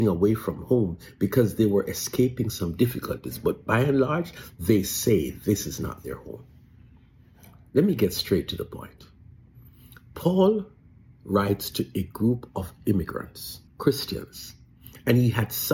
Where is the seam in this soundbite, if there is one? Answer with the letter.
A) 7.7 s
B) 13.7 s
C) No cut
B